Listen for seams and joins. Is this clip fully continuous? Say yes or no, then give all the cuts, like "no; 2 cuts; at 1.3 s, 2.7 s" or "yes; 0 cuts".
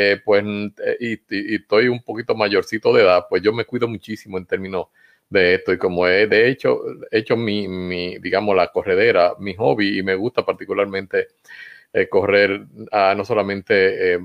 yes; 0 cuts